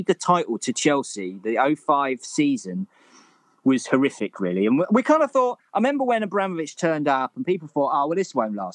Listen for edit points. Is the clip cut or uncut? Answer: uncut